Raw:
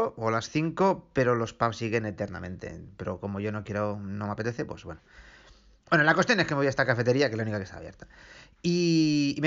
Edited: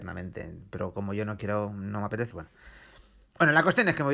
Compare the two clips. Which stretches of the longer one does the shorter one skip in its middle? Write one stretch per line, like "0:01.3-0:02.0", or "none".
0:04.6-0:04.8